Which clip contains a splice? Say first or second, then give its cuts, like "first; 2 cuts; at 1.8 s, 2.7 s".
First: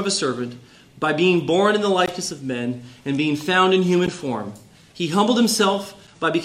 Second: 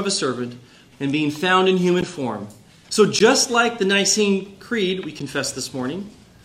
second; 2 cuts; at 0.9 s, 2.8 s